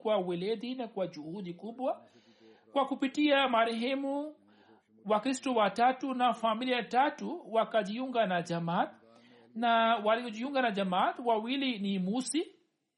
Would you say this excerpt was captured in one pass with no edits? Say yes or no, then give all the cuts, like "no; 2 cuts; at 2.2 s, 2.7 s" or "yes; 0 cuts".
yes; 0 cuts